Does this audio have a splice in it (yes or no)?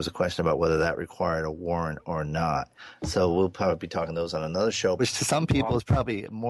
yes